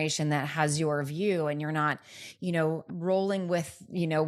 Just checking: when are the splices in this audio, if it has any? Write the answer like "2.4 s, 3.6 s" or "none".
2.9 s